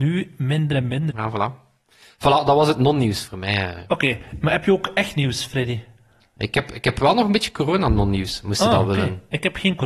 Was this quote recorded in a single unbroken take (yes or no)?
no